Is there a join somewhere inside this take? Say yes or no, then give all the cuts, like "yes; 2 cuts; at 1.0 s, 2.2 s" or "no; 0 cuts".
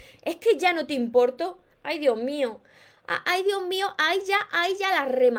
yes; 1 cut; at 1.7 s